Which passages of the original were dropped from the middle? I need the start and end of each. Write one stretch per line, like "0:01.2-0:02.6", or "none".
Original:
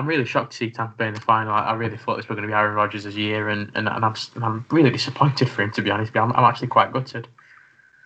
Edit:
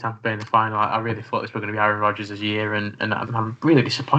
0:04.0-0:04.3